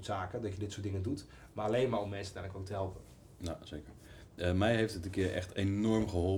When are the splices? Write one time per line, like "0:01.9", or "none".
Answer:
none